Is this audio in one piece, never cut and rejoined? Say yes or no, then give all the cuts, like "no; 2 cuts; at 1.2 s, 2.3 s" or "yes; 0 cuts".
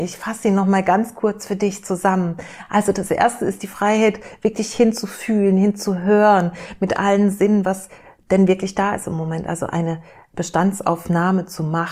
yes; 0 cuts